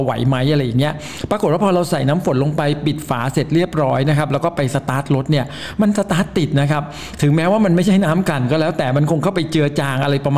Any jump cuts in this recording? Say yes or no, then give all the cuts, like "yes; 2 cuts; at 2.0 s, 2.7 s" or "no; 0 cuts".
no; 0 cuts